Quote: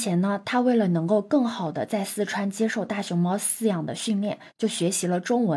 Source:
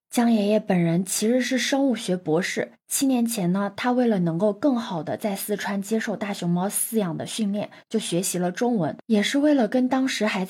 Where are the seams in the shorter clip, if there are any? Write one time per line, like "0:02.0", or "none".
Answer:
none

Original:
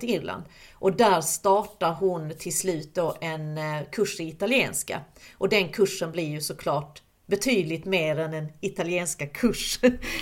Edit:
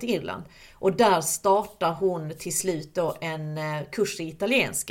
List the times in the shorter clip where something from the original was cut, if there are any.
none

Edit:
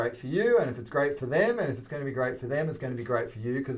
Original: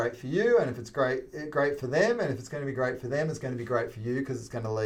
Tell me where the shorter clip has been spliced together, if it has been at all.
0:00.9

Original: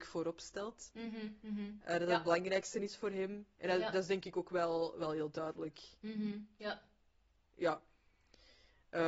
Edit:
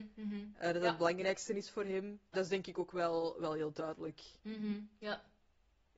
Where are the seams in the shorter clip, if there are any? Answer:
0:02.3

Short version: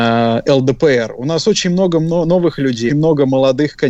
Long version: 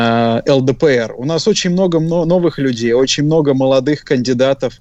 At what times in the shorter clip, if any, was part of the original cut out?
0:02.9

